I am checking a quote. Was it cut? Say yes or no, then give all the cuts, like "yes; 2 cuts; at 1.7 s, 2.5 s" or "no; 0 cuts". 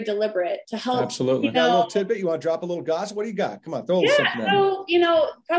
yes; 1 cut; at 1.5 s